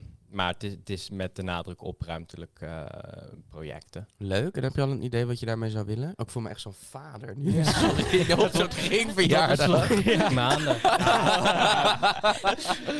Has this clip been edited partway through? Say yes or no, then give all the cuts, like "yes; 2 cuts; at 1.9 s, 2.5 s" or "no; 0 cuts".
yes; 1 cut; at 10.3 s